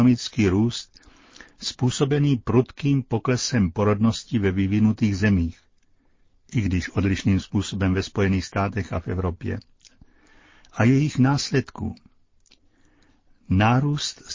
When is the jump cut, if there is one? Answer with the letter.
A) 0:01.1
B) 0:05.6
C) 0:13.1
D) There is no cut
D